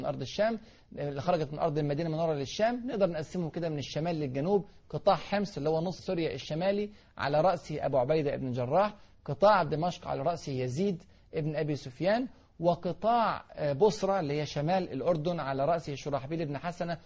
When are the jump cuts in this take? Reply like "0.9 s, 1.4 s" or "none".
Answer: 6.0 s